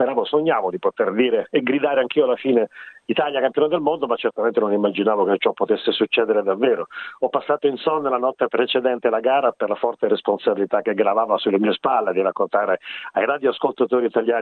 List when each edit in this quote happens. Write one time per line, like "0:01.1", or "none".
none